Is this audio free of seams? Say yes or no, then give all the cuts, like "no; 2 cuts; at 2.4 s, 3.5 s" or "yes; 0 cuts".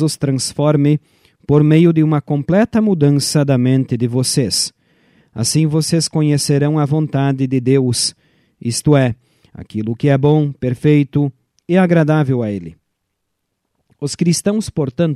yes; 0 cuts